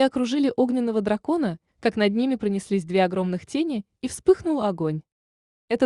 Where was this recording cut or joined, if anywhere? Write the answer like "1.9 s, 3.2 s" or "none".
1.7 s